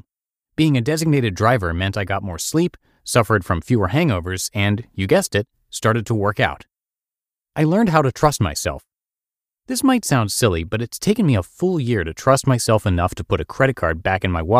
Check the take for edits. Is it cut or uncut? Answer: uncut